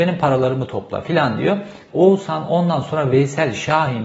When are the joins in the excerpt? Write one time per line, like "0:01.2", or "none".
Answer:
0:01.9